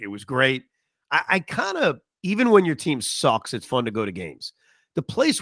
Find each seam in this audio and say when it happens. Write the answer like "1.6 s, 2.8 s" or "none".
2.1 s, 3.6 s